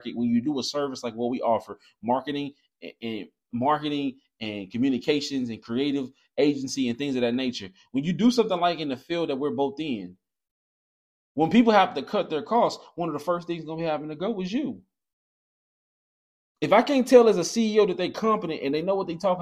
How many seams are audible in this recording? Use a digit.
0